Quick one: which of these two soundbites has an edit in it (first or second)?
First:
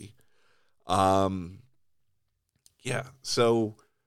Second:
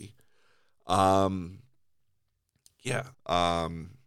second